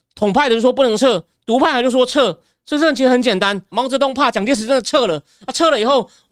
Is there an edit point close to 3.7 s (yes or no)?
yes